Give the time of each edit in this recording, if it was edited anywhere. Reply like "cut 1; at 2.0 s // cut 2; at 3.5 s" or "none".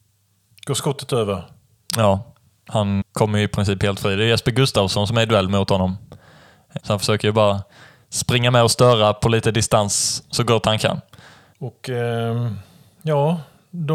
cut 1; at 3.0 s // cut 2; at 6.8 s // cut 3; at 11.5 s